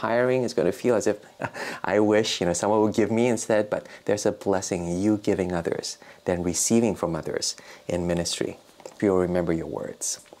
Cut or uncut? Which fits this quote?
cut